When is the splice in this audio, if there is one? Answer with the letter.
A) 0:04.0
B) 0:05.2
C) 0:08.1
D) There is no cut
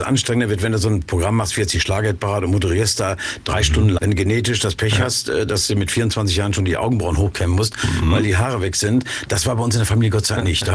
A